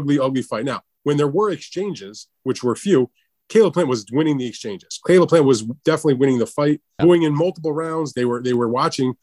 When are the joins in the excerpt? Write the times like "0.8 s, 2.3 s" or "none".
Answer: 7.0 s, 8.1 s

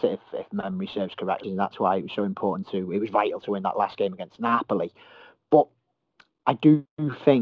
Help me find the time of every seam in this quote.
1.4 s

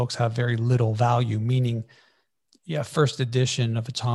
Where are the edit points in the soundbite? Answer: none

